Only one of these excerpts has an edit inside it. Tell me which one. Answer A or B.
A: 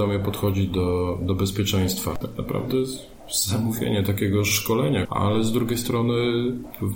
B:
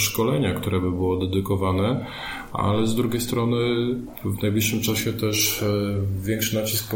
A